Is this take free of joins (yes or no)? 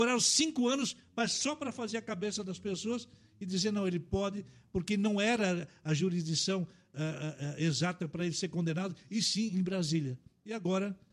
yes